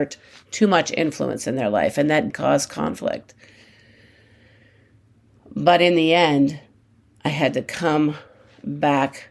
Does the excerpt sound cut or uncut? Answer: cut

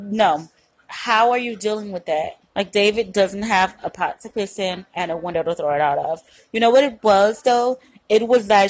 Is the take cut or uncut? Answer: cut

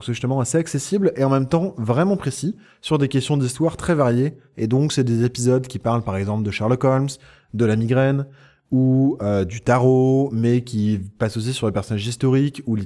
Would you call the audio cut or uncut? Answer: uncut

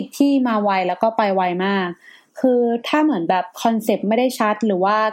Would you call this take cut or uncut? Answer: uncut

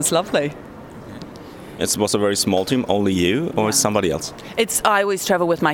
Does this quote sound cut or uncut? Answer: cut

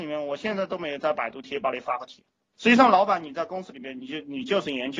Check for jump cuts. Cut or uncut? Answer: cut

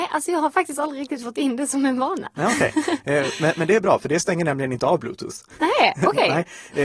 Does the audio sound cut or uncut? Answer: uncut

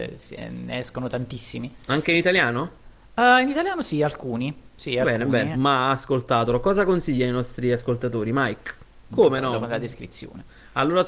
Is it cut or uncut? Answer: cut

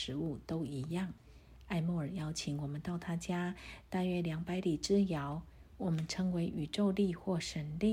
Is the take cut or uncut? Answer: cut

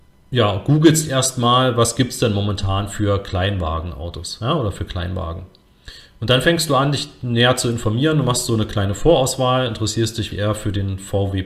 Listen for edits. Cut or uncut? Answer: cut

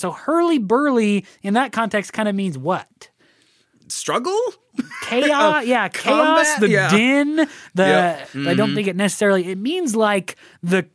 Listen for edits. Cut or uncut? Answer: cut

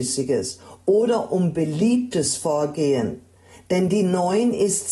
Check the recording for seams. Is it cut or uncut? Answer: uncut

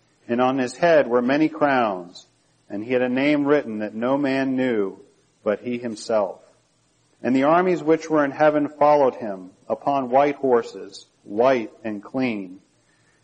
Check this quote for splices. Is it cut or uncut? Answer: cut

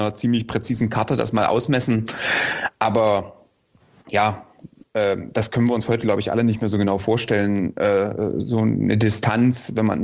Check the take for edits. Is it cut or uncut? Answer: uncut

